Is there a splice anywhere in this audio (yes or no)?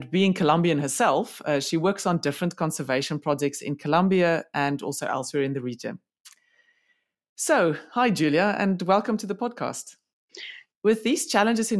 yes